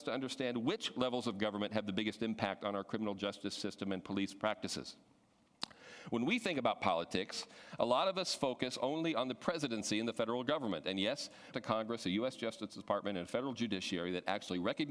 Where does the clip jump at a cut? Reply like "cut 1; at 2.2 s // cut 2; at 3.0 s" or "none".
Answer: cut 1; at 11.5 s